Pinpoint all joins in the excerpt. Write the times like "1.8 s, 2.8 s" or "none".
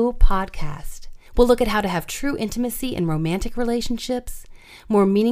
1.3 s